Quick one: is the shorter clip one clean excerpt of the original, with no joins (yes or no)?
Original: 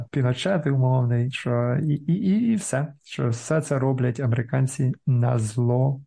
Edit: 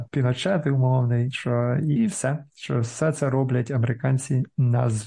no